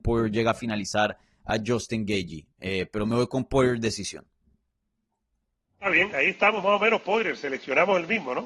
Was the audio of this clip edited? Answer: no; 0 cuts

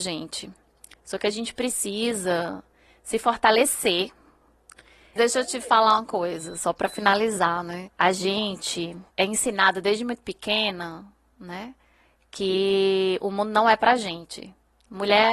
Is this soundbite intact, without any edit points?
no; 1 cut; at 5.2 s

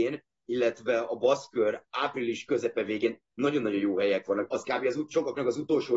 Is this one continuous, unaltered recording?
no; 1 cut; at 4.5 s

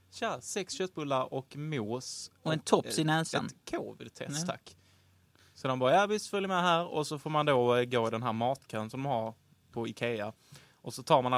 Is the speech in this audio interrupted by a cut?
no; 0 cuts

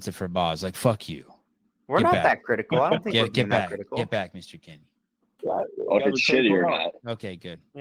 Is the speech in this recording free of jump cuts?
no; 1 cut; at 6.0 s

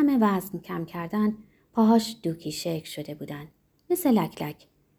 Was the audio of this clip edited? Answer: no; 0 cuts

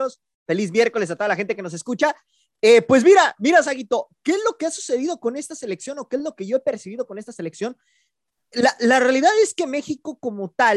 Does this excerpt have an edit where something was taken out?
no; 0 cuts

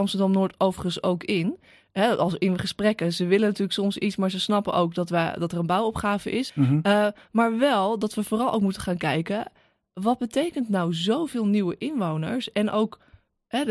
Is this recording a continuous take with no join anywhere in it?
no; 1 cut; at 6.5 s

